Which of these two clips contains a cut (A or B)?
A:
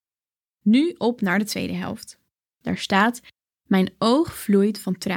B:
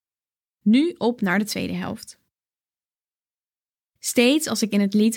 A